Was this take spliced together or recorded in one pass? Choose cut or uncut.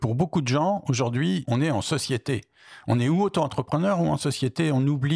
cut